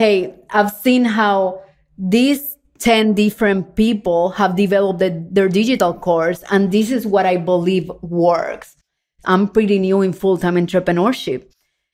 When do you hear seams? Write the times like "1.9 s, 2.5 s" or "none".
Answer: 9.2 s